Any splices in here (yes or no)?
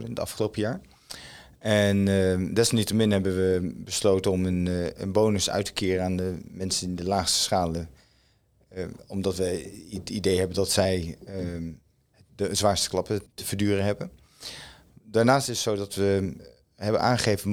yes